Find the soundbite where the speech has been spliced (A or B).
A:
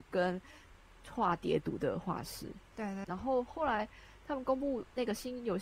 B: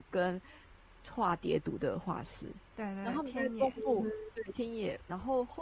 A